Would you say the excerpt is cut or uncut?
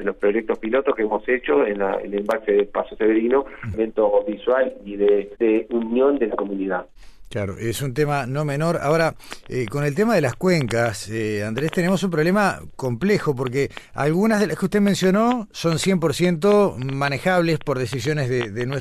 cut